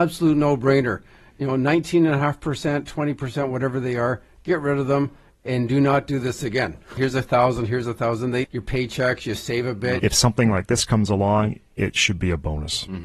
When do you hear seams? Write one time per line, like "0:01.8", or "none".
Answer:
0:07.0
0:08.4
0:10.0

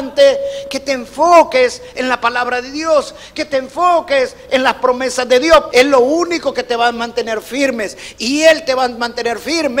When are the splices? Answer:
0:05.7

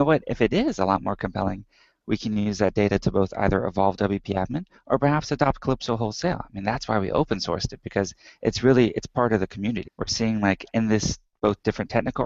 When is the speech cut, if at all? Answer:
0:09.8

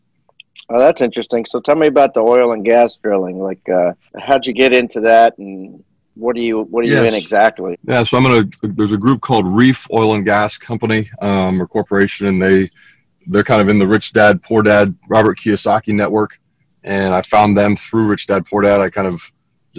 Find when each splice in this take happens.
0:07.7

